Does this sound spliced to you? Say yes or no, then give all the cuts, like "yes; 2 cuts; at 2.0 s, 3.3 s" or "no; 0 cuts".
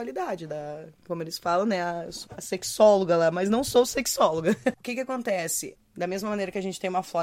yes; 3 cuts; at 2.3 s, 4.7 s, 5.8 s